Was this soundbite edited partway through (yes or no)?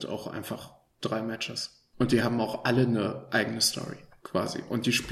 yes